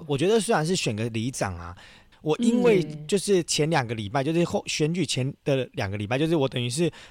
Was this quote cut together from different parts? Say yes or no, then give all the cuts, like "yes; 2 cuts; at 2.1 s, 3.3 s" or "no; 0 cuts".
yes; 1 cut; at 2.1 s